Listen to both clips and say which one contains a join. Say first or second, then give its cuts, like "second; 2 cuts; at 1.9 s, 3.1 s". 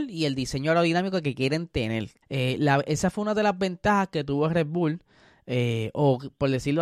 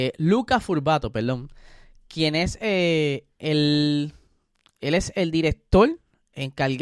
first; 1 cut; at 2.2 s